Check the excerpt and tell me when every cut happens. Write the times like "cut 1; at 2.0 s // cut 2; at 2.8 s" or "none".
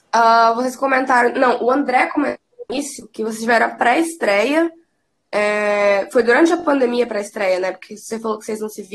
none